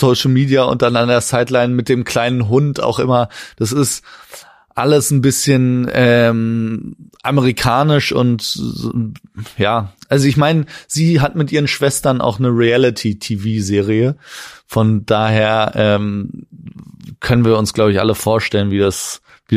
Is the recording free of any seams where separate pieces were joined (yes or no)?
yes